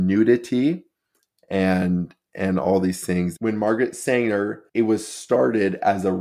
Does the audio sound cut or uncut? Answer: cut